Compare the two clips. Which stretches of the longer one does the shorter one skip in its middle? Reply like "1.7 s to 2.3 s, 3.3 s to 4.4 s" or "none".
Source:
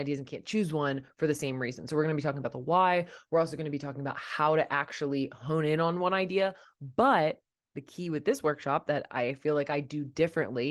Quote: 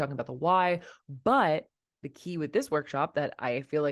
3.2 s to 6.7 s